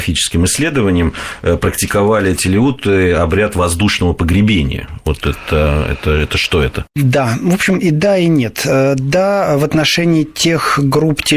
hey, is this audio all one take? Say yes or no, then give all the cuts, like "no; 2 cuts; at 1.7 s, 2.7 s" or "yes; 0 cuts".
yes; 0 cuts